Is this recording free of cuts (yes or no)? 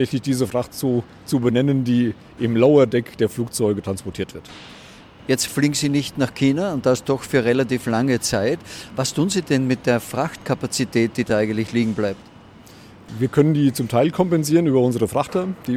yes